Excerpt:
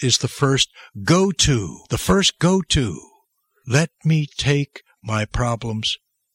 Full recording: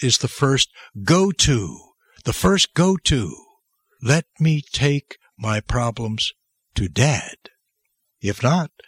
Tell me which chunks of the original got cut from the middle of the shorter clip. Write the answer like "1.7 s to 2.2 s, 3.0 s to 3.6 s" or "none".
1.8 s to 2.2 s